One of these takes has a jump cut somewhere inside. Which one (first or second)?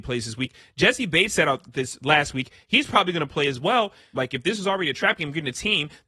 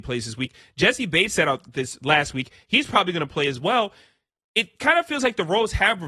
first